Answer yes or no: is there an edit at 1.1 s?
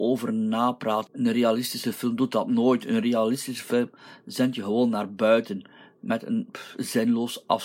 yes